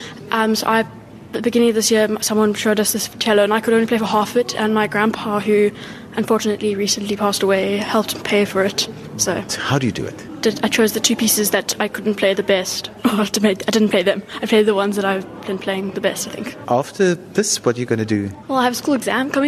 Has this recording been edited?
yes; 1 cut; at 9.5 s

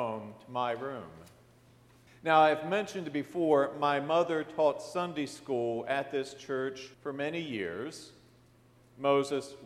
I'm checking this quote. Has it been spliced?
yes; 2 cuts; at 2.1 s, 6.9 s

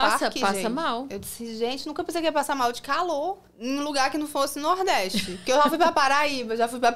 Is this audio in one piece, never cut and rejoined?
no; 1 cut; at 3.5 s

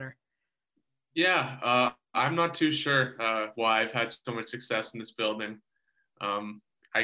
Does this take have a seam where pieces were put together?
no; 0 cuts

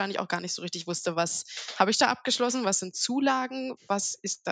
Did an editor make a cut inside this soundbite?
no; 0 cuts

